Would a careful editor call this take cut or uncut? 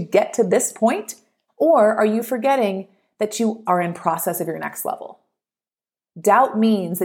cut